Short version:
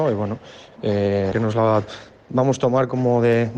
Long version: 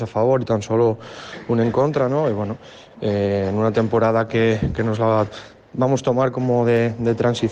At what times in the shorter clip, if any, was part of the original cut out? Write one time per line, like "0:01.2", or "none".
0:01.3

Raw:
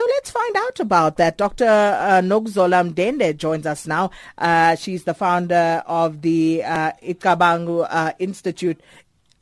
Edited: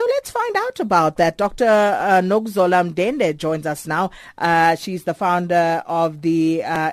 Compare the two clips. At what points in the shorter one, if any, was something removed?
none

